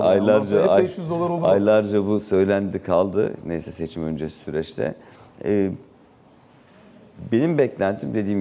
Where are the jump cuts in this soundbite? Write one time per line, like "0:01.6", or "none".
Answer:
none